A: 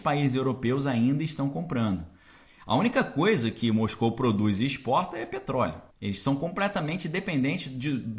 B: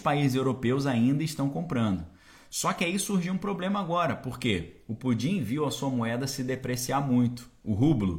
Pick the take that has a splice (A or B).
A